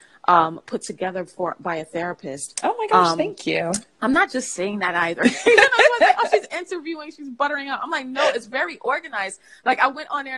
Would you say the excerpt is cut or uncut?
uncut